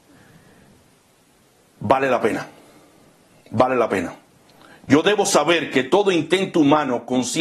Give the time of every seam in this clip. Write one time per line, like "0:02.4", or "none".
none